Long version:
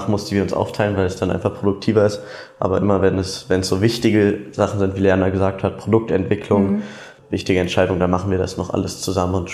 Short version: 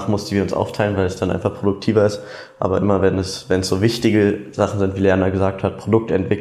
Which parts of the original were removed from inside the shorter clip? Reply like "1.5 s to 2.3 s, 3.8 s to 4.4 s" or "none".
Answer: none

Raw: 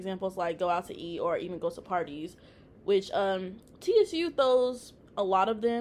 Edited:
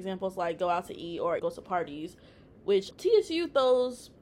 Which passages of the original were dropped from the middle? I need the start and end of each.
1.4 s to 1.6 s, 3.1 s to 3.7 s

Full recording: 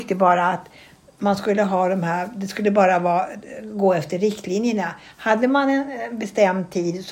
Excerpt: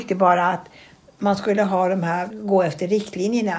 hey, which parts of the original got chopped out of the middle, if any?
2.3 s to 3.6 s

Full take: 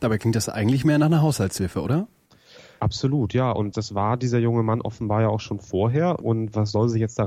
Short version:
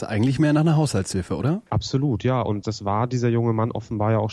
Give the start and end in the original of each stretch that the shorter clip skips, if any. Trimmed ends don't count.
2.1 s to 2.8 s

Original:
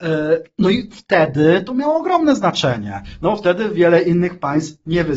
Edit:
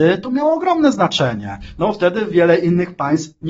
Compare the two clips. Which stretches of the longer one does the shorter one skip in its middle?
none

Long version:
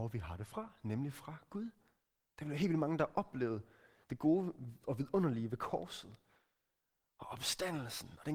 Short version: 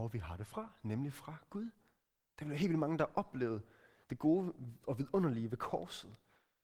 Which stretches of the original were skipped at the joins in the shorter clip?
none

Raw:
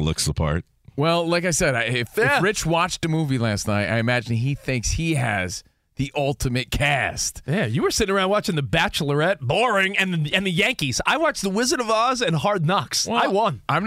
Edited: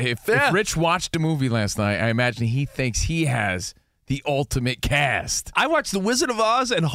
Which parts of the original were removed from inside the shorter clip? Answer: 7.4 s to 11.0 s

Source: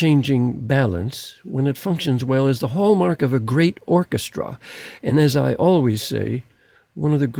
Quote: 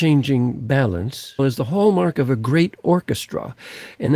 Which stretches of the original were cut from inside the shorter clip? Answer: 1.4 s to 2.4 s

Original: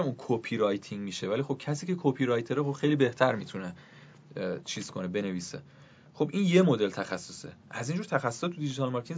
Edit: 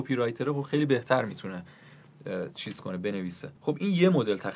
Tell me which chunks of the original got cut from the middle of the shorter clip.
5.7 s to 6.1 s

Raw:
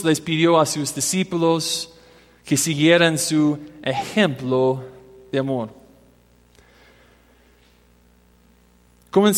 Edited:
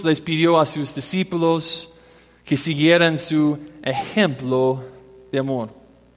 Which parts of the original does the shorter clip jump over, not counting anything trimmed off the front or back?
none

